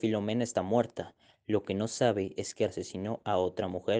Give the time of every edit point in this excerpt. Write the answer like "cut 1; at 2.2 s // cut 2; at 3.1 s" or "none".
cut 1; at 2.7 s